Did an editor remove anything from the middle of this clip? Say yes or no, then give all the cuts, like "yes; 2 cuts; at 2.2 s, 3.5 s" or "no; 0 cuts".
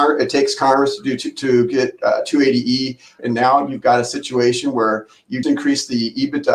yes; 2 cuts; at 3.2 s, 5.4 s